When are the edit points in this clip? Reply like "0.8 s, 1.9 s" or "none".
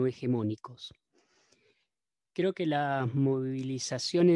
none